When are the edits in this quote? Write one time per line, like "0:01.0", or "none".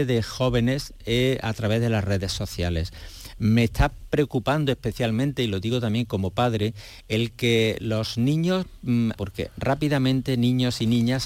0:09.1